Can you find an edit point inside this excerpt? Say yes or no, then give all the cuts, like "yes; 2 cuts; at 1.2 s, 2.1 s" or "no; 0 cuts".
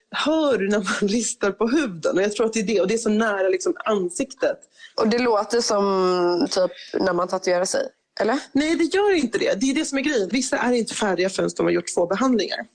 yes; 2 cuts; at 4.9 s, 10.3 s